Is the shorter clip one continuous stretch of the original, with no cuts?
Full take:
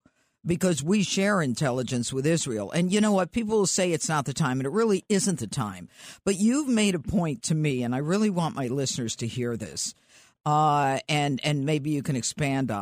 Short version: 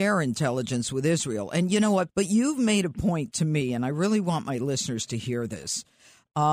no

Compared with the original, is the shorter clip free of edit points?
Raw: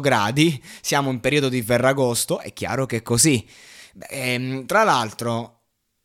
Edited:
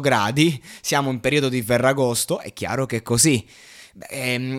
yes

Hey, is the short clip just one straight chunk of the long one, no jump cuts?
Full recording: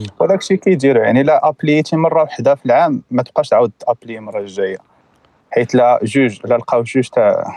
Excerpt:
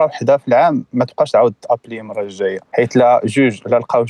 no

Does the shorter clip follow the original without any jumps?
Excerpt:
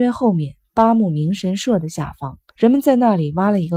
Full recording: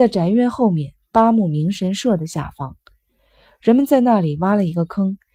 no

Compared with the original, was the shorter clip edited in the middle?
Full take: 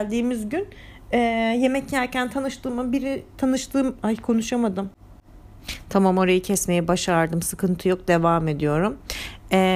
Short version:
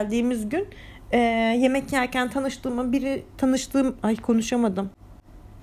no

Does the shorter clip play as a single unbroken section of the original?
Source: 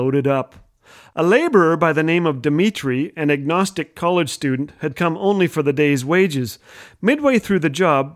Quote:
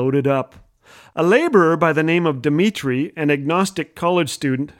yes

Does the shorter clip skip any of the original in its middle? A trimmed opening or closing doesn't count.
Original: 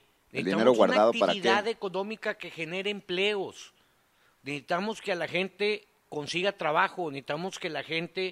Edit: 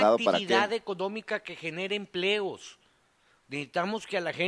no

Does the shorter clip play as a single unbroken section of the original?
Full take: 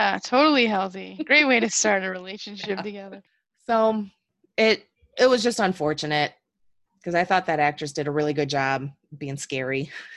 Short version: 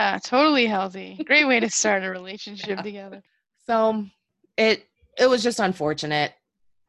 yes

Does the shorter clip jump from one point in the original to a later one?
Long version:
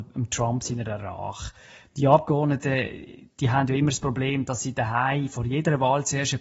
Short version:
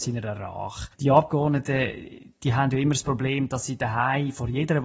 yes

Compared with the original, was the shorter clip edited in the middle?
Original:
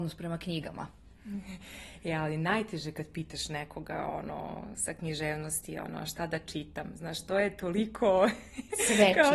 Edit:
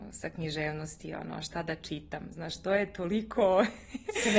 no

